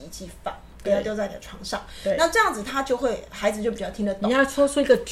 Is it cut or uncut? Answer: uncut